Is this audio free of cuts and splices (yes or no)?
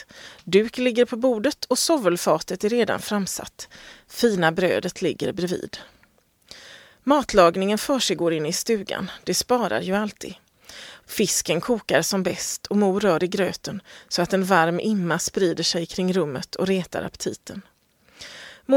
no